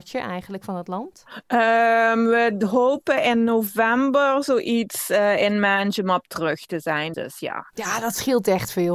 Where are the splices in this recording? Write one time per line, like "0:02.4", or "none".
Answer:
0:07.1